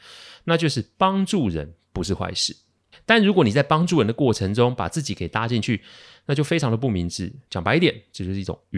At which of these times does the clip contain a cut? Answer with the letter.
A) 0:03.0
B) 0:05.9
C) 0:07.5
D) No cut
D